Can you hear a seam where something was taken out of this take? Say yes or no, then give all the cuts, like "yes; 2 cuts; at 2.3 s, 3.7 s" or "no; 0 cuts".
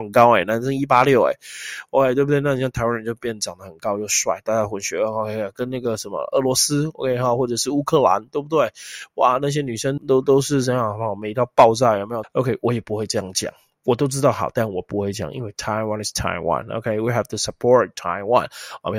yes; 2 cuts; at 10.0 s, 12.2 s